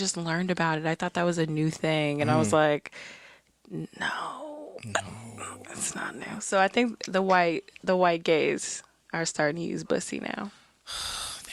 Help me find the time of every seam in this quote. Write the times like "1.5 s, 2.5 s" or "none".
none